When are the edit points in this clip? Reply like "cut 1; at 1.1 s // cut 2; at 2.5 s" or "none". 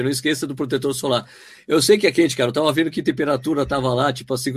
none